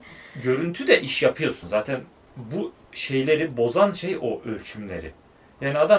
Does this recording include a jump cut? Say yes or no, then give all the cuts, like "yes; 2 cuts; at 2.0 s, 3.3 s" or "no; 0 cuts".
no; 0 cuts